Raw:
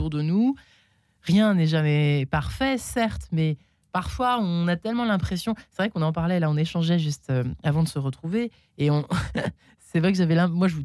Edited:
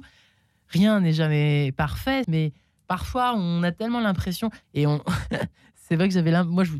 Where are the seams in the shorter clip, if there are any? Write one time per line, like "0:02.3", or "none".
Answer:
0:02.2
0:04.6